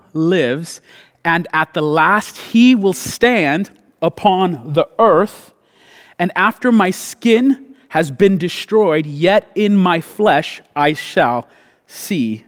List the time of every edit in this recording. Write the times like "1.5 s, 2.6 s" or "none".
none